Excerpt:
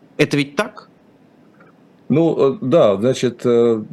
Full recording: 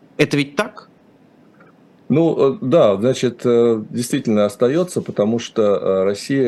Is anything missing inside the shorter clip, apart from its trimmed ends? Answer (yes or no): no